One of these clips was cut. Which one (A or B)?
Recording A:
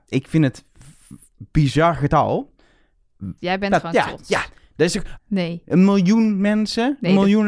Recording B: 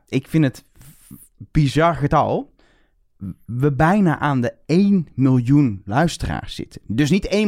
A